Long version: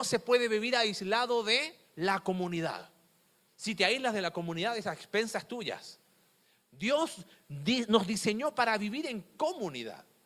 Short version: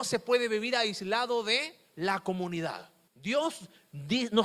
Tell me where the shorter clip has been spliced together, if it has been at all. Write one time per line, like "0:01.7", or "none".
0:03.1